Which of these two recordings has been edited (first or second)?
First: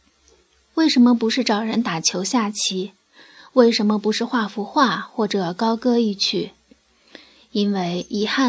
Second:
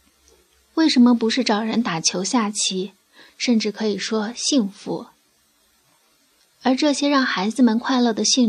second